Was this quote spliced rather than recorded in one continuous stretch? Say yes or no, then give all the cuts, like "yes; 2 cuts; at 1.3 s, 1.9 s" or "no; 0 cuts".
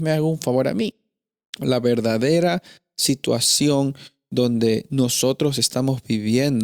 no; 0 cuts